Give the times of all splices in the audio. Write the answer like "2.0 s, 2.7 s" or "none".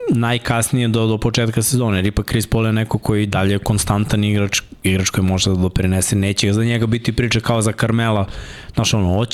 none